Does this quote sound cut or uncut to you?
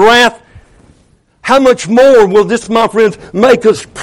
uncut